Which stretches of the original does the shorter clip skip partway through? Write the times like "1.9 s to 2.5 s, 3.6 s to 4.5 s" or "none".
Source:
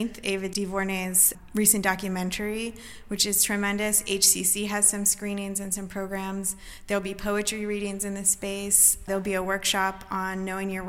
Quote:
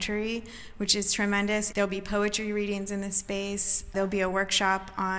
4.0 s to 6.9 s